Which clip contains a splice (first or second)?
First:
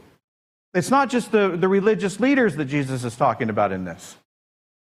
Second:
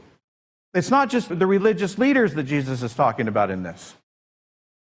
second